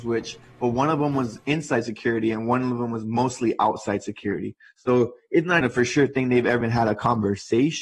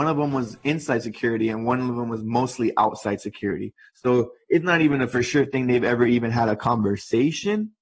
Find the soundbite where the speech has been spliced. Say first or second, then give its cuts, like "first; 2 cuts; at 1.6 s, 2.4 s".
first; 2 cuts; at 5.6 s, 6.6 s